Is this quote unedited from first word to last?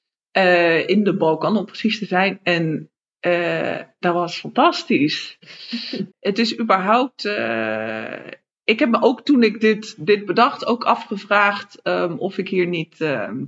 no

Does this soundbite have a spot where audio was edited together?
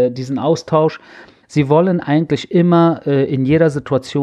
yes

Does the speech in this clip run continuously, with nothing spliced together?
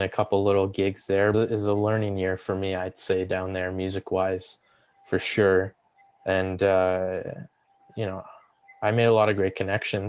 no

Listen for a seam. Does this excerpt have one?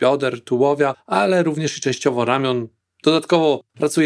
no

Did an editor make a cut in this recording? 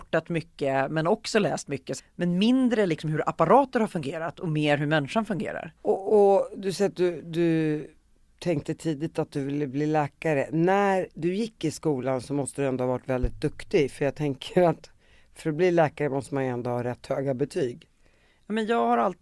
yes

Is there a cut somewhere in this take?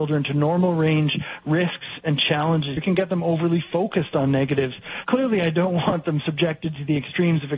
yes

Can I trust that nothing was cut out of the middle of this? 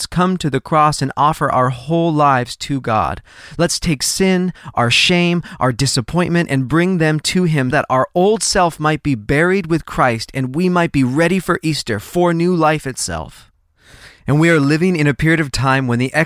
no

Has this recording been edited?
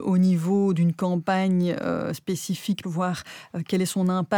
yes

